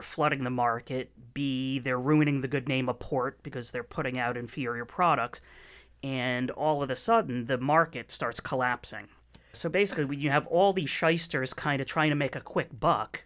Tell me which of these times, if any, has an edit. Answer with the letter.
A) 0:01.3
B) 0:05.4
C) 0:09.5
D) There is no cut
C